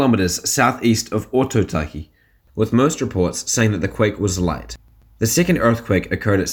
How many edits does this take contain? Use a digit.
1